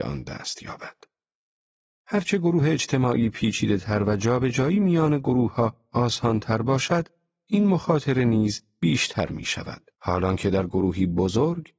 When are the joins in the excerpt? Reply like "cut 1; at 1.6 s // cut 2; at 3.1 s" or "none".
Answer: cut 1; at 10.0 s